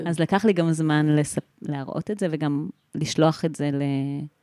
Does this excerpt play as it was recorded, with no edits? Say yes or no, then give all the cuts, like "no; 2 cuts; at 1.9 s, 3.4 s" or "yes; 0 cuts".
yes; 0 cuts